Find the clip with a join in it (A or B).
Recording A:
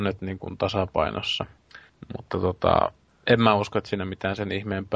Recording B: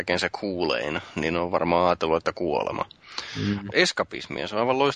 B